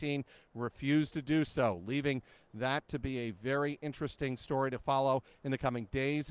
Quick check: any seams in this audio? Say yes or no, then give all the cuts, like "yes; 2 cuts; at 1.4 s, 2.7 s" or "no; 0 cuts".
no; 0 cuts